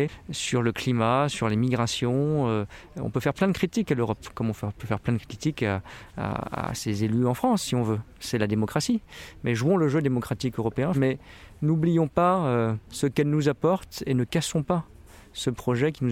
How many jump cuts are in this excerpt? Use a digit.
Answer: 0